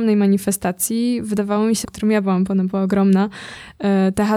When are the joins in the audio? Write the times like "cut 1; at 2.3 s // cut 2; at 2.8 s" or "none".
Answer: cut 1; at 1.8 s